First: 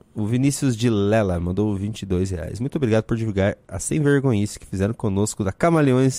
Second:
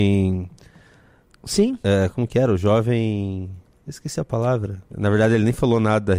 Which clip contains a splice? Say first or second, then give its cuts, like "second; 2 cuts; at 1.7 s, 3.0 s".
second; 1 cut; at 4.9 s